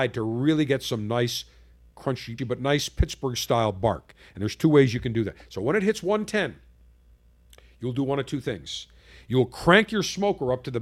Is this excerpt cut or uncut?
cut